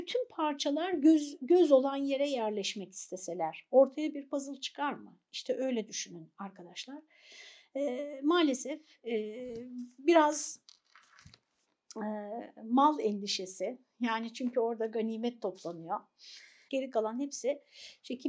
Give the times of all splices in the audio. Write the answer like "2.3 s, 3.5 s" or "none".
16.7 s